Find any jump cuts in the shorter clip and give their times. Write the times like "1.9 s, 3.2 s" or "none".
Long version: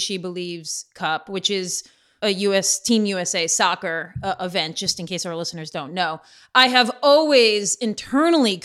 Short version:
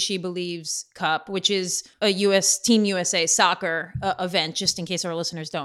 1.9 s